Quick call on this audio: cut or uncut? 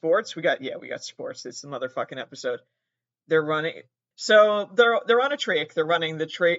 cut